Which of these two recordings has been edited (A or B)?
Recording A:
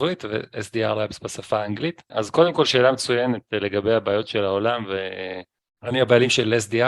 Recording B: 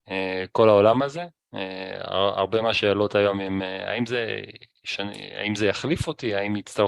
A